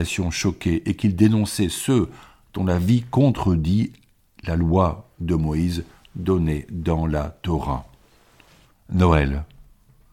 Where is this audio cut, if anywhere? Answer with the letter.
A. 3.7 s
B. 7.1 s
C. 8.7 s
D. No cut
C